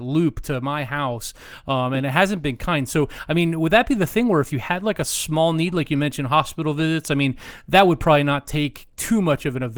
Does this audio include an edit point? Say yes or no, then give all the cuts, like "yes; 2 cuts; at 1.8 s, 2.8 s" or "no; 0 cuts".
no; 0 cuts